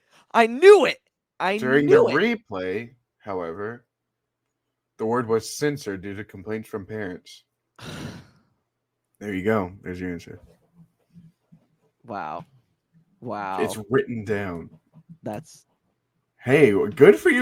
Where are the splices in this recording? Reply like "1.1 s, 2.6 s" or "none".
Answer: none